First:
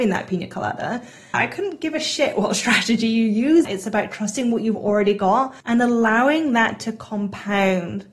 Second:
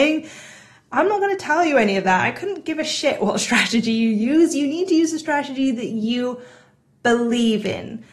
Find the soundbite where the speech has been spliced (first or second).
first